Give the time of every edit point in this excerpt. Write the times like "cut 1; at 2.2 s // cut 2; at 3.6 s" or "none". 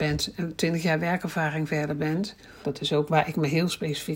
cut 1; at 2.6 s